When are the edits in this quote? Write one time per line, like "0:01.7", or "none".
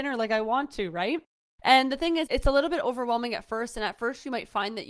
0:02.3